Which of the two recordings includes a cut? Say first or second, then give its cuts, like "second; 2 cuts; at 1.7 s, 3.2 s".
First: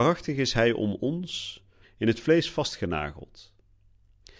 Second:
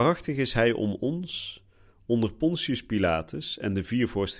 first; 1 cut; at 1.8 s